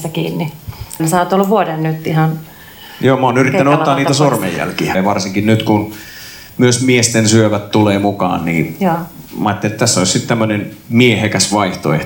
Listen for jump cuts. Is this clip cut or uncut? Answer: cut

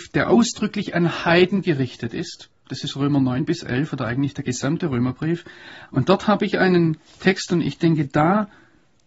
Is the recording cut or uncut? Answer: cut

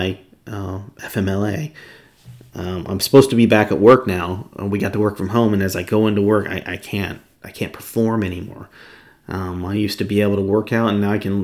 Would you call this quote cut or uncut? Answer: uncut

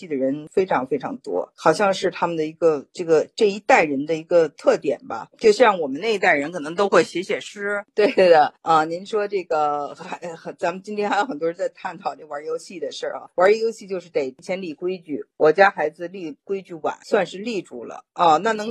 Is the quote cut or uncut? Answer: uncut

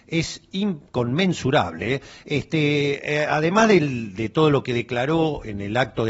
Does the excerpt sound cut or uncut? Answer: uncut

